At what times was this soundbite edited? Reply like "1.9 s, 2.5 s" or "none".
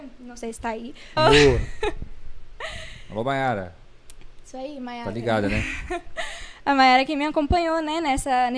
1.2 s